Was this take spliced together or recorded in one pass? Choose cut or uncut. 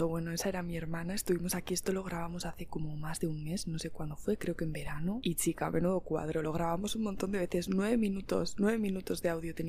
uncut